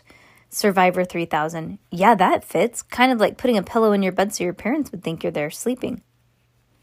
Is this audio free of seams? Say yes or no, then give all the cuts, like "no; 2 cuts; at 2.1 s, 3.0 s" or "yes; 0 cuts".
yes; 0 cuts